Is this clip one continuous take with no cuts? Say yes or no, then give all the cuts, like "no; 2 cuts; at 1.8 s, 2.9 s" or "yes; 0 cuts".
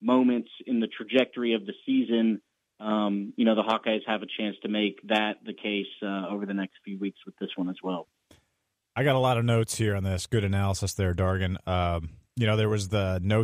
yes; 0 cuts